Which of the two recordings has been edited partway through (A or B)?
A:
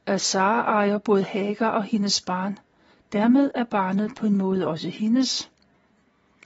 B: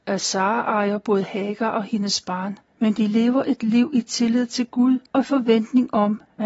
B